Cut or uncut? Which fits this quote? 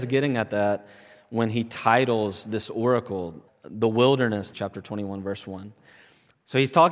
cut